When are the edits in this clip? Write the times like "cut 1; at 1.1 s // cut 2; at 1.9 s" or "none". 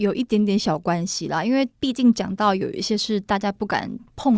cut 1; at 1.7 s